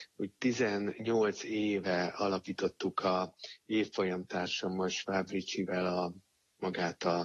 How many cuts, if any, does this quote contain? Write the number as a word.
zero